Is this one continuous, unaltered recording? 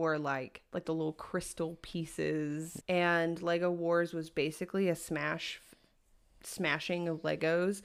no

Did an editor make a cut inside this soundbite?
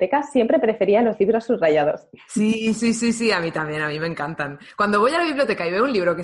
no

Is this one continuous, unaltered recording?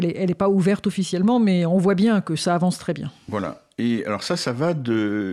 yes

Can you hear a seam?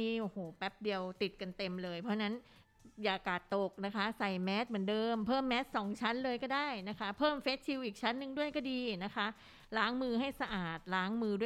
no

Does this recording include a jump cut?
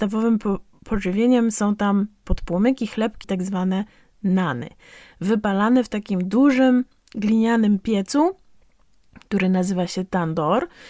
yes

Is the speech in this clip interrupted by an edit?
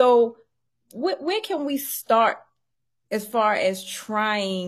no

